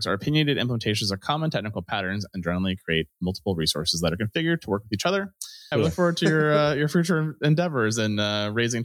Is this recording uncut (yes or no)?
no